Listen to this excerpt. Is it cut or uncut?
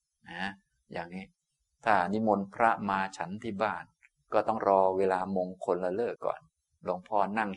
cut